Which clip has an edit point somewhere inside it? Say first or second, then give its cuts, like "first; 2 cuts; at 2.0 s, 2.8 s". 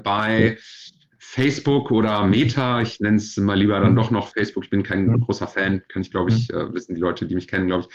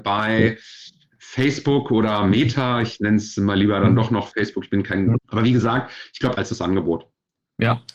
second; 2 cuts; at 5.2 s, 6.3 s